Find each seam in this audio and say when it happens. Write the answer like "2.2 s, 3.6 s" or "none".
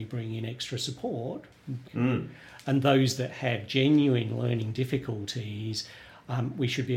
1.8 s